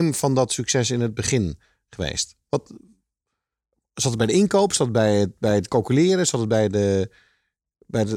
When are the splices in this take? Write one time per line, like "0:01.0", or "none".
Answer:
none